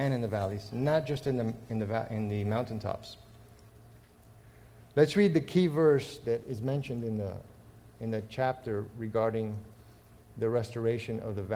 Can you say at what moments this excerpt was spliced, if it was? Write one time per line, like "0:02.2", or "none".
none